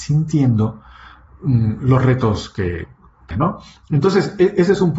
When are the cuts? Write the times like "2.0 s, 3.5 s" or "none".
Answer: 3.3 s